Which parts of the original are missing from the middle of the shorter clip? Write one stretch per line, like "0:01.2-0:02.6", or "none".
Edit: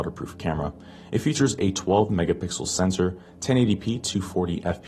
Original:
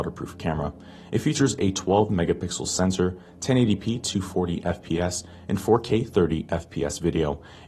none